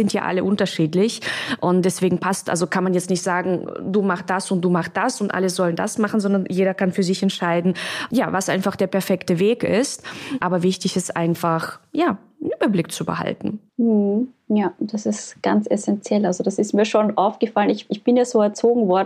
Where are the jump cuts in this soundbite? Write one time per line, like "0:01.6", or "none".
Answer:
none

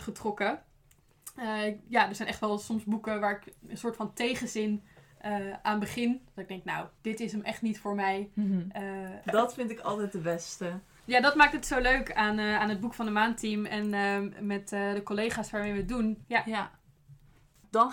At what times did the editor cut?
0:07.0
0:09.2
0:16.2

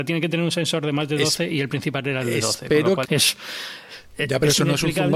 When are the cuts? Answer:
0:03.0

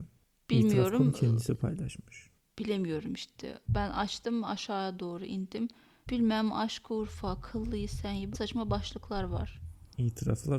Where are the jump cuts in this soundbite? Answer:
0:06.1
0:08.3

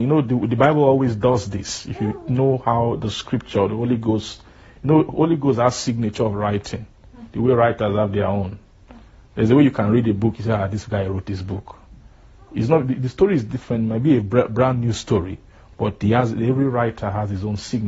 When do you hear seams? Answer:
none

